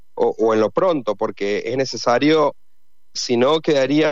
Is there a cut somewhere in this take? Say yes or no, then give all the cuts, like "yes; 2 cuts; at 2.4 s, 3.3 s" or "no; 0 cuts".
yes; 1 cut; at 3.1 s